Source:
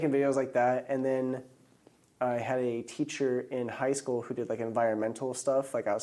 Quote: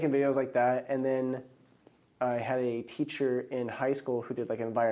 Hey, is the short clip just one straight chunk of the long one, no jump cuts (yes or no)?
yes